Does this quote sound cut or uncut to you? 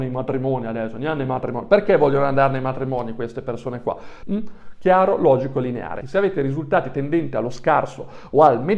cut